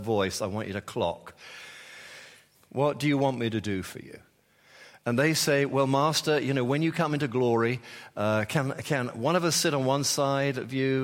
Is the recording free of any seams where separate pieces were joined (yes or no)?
no